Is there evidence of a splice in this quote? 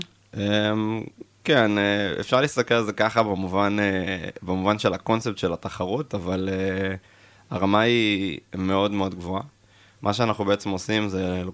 no; 0 cuts

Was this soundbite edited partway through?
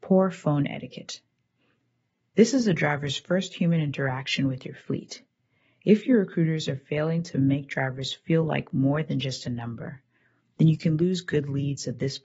no; 0 cuts

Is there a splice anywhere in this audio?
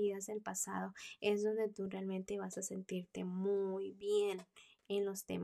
no; 0 cuts

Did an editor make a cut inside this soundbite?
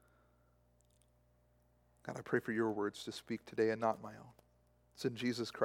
no; 0 cuts

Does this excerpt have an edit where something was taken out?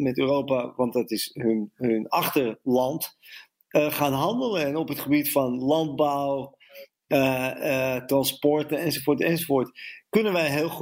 no; 0 cuts

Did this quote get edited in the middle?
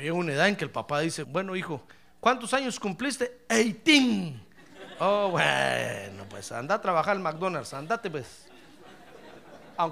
yes; 1 cut; at 1.2 s

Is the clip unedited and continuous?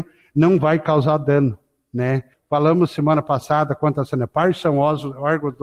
no; 1 cut; at 2.3 s

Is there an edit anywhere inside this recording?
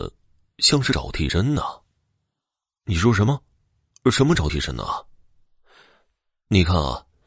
no; 0 cuts

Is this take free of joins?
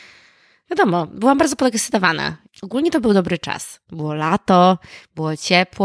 no; 1 cut; at 2.5 s

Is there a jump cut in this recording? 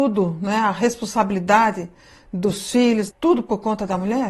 yes; 1 cut; at 3.1 s

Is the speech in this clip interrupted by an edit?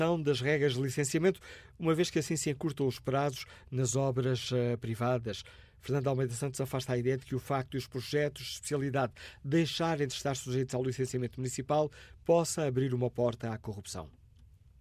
no; 0 cuts

